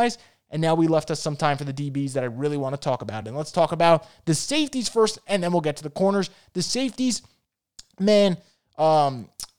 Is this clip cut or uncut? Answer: uncut